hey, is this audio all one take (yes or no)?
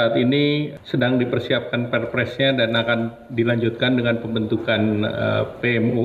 yes